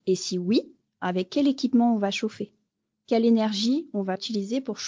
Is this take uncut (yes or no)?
yes